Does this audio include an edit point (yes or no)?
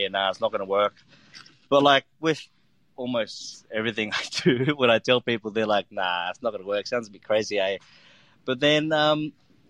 no